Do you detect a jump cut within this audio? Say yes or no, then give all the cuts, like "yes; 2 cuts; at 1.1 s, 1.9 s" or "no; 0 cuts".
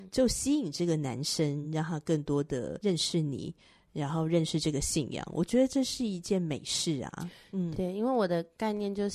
no; 0 cuts